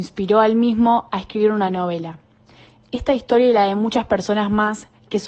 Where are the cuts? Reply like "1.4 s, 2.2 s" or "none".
none